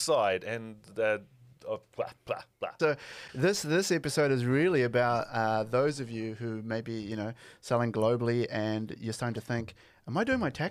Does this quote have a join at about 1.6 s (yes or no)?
no